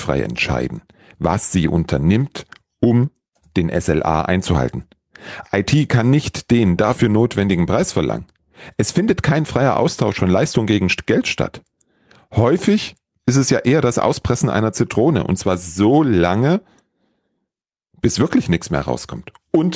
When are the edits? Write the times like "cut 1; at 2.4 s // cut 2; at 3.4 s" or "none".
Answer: none